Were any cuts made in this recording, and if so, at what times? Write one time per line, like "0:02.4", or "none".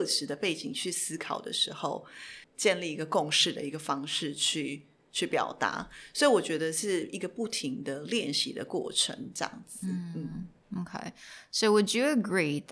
0:02.4